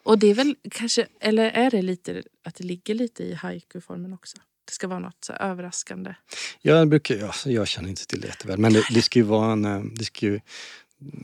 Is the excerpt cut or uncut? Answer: uncut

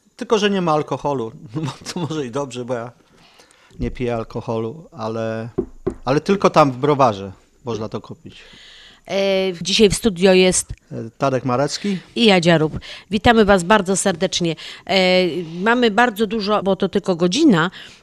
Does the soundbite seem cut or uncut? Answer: cut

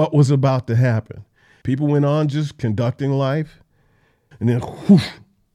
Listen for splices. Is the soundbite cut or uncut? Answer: cut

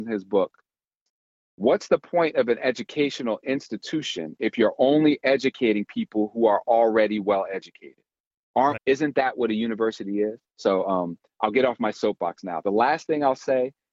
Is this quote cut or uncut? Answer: cut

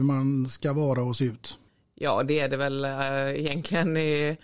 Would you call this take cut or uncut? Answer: uncut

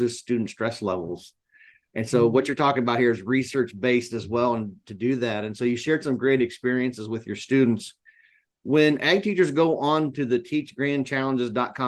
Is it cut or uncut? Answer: uncut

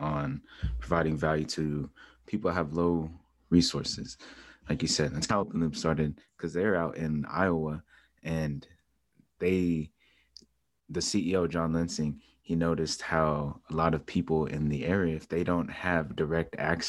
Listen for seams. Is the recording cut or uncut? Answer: uncut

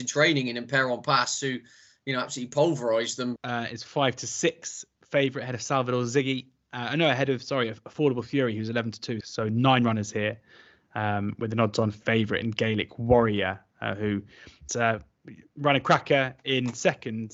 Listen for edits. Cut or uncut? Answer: cut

